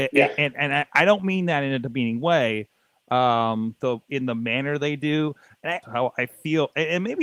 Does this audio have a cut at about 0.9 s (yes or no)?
no